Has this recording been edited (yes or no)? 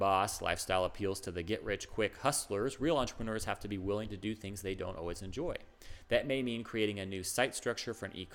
no